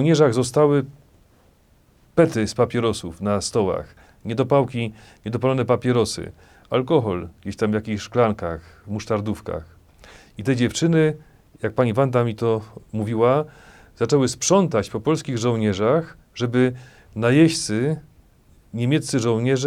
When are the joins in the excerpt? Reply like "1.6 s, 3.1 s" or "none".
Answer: none